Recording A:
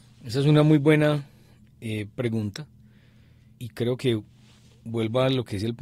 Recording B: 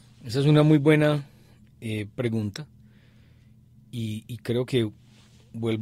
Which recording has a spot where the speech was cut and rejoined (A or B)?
A